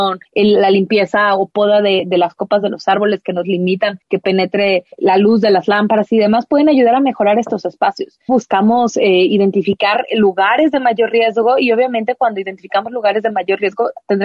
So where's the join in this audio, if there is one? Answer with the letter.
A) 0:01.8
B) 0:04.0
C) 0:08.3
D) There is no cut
C